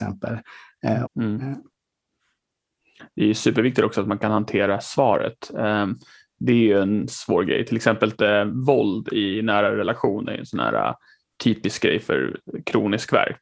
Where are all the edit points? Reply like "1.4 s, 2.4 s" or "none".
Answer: 1.0 s